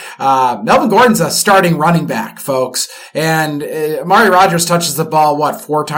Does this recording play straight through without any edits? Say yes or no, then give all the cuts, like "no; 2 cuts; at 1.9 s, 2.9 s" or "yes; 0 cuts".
yes; 0 cuts